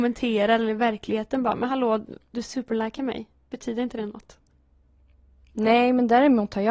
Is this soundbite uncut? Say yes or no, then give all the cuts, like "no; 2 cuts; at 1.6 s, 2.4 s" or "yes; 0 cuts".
yes; 0 cuts